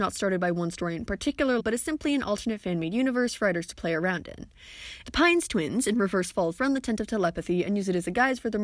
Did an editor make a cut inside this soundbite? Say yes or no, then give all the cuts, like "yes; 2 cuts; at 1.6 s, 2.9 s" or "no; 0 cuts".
yes; 3 cuts; at 1.6 s, 5.0 s, 6.6 s